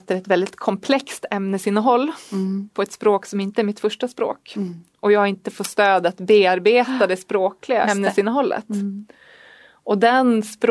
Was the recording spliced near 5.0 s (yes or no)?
no